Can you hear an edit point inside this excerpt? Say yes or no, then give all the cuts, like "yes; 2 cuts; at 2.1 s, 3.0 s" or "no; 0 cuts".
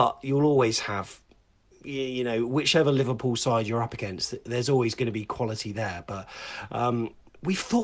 no; 0 cuts